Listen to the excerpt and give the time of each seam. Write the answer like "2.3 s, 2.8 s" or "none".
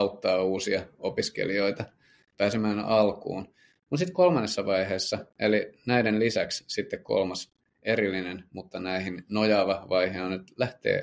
none